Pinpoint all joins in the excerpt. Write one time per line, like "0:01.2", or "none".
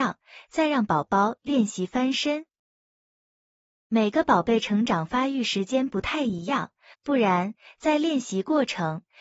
0:03.7
0:06.9